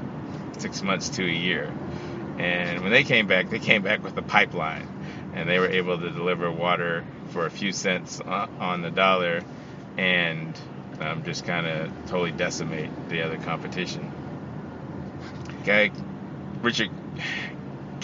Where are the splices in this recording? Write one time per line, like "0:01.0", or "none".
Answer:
0:15.6